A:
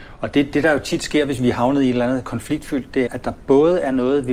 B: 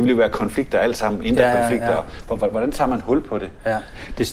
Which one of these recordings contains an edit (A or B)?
A